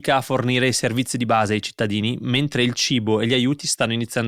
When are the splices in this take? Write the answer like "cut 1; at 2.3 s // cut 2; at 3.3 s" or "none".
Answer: none

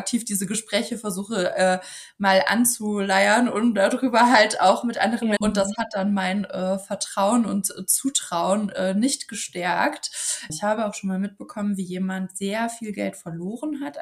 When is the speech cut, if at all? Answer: cut 1; at 5.4 s // cut 2; at 10.5 s

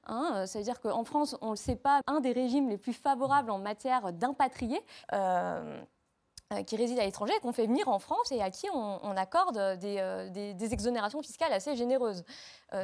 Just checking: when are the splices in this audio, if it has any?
cut 1; at 2.0 s // cut 2; at 5.0 s

